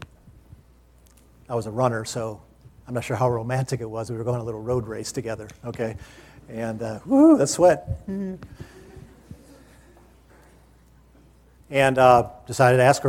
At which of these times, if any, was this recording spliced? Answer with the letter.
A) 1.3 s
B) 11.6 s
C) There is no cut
B